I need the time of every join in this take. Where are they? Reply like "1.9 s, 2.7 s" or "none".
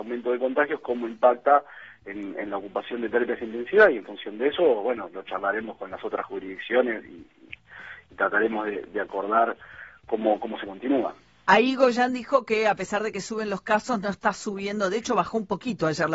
none